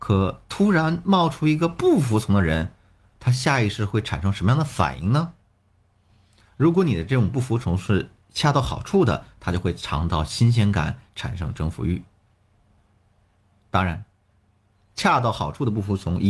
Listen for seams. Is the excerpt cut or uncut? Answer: uncut